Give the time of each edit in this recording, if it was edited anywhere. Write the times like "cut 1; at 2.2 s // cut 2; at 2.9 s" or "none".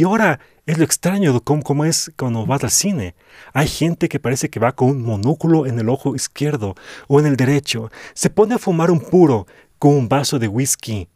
none